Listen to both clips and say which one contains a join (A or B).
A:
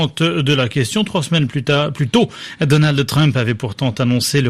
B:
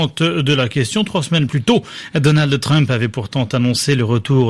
B